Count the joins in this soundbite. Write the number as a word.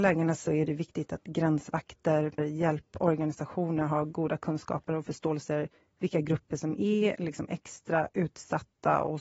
one